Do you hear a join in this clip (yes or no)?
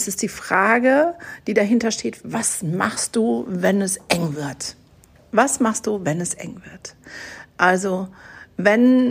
no